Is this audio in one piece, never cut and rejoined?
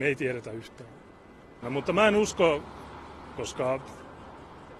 no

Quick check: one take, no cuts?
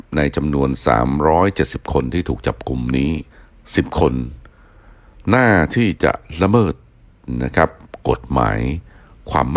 no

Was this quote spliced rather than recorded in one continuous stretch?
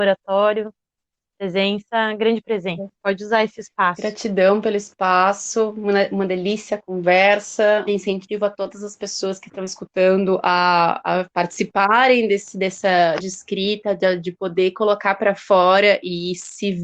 yes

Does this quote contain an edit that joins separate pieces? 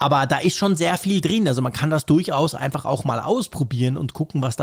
no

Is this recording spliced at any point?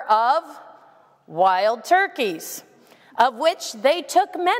no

